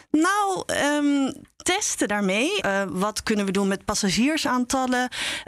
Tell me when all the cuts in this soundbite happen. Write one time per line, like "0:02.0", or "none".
0:02.6